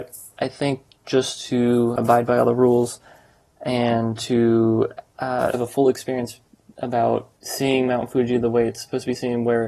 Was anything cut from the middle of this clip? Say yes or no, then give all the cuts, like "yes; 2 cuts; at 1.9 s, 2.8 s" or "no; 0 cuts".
yes; 3 cuts; at 2.0 s, 5.5 s, 7.4 s